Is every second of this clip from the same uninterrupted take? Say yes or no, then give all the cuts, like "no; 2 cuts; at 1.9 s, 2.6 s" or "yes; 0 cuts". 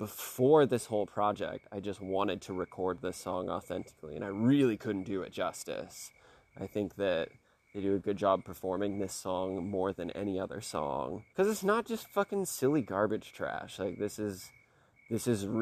no; 1 cut; at 11.3 s